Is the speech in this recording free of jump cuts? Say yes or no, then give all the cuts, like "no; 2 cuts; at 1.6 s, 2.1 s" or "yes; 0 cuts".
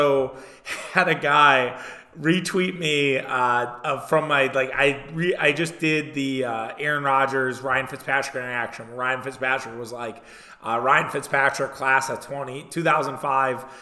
yes; 0 cuts